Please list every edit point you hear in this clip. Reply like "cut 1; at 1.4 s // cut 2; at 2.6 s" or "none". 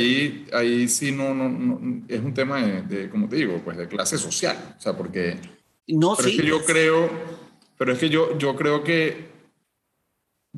cut 1; at 5.8 s // cut 2; at 8.4 s